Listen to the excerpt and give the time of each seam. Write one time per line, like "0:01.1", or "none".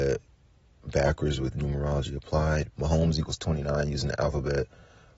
0:02.7